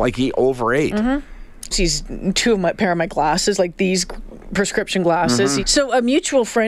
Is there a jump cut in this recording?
yes; 2 cuts; at 1.7 s, 5.6 s

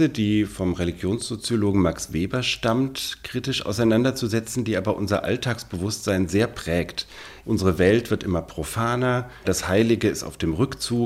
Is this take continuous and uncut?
no; 2 cuts; at 7.4 s, 9.4 s

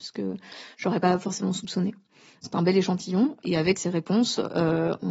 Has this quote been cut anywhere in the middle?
yes; 2 cuts; at 2.4 s, 3.8 s

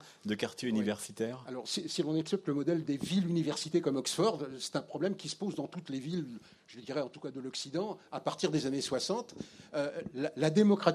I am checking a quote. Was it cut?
no; 0 cuts

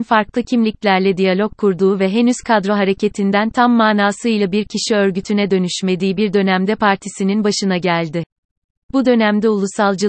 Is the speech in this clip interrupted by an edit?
no; 0 cuts

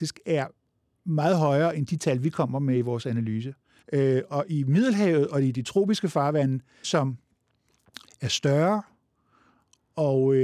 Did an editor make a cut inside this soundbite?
yes; 2 cuts; at 3.8 s, 6.8 s

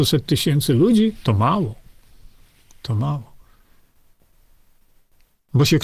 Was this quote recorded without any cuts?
yes; 0 cuts

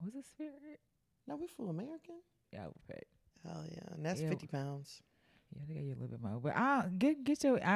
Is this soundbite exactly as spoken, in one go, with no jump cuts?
no; 1 cut; at 2.4 s

